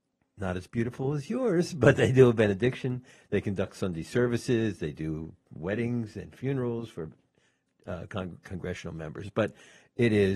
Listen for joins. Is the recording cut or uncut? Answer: uncut